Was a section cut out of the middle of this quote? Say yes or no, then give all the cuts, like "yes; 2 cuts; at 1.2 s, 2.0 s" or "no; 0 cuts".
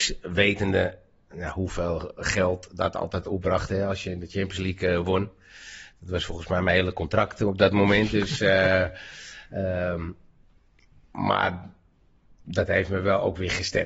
no; 0 cuts